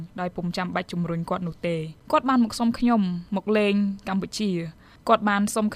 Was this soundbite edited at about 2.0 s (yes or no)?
yes